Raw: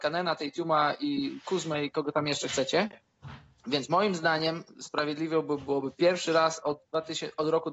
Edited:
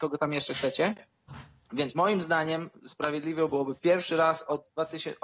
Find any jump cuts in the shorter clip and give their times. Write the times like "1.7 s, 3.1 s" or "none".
3.5 s